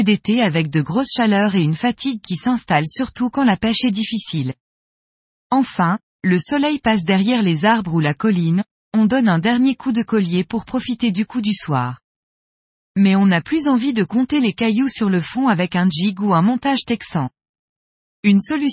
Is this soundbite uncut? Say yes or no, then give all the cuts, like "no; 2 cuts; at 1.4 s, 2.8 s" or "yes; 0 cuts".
yes; 0 cuts